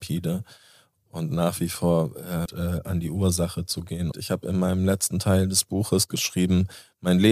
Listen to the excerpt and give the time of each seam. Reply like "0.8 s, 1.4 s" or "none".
2.5 s, 4.1 s